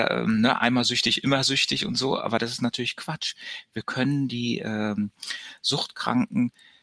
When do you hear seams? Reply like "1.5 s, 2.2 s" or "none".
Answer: none